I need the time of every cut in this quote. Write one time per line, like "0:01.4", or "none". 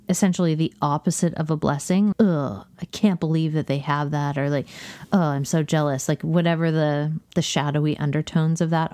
0:02.1